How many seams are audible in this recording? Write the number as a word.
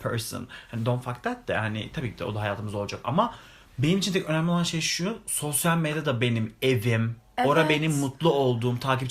zero